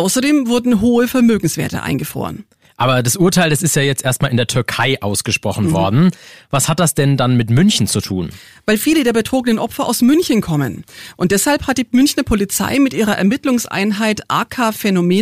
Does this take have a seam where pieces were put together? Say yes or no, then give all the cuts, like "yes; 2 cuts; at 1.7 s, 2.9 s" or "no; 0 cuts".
no; 0 cuts